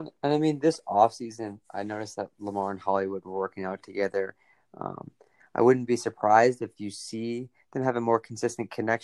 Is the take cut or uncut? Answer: uncut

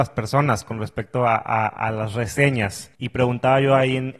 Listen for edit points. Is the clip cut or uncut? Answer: uncut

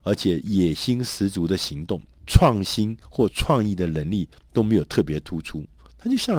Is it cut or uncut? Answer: cut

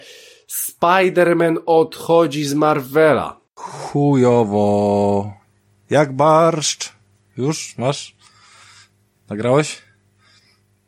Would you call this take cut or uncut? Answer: cut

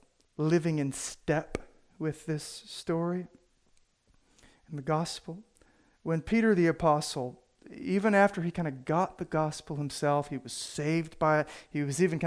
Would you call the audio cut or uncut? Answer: uncut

